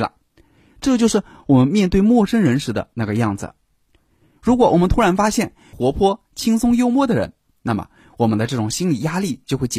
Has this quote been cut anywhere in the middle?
yes; 2 cuts; at 4.4 s, 5.7 s

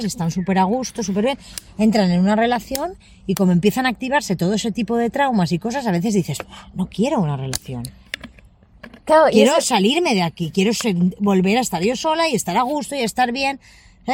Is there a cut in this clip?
no; 0 cuts

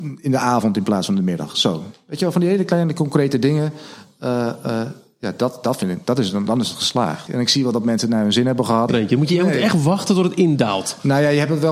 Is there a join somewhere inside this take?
yes; 2 cuts; at 7.3 s, 8.9 s

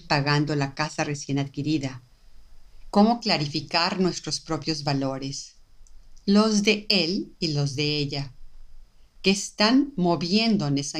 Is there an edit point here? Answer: yes; 1 cut; at 2.9 s

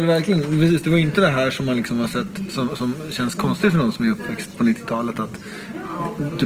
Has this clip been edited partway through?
no; 0 cuts

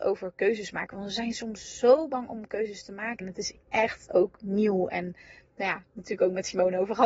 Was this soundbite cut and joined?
yes; 1 cut; at 3.2 s

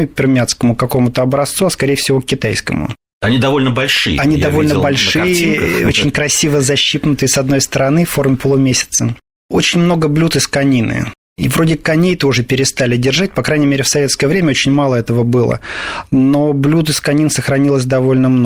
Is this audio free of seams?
yes; 0 cuts

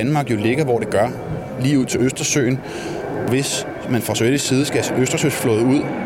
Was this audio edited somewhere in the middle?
no; 0 cuts

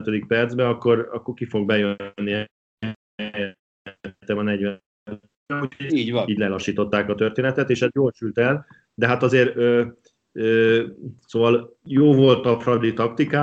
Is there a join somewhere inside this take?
no; 0 cuts

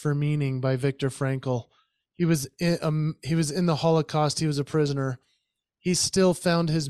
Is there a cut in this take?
no; 0 cuts

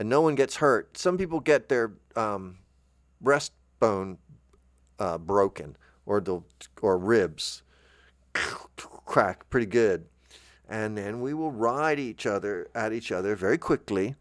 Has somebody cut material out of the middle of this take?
no; 0 cuts

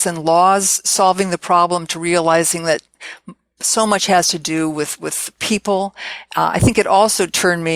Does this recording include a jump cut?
no; 0 cuts

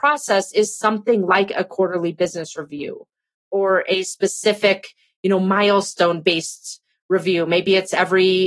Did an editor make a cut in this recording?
no; 0 cuts

